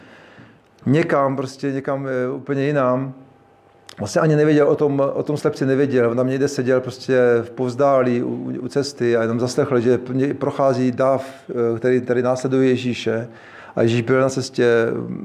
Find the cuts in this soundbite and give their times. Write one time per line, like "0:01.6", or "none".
none